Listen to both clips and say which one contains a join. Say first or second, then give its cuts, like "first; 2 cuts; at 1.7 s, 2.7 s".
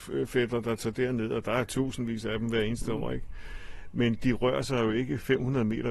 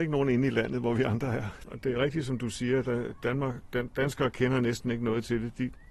second; 1 cut; at 1.7 s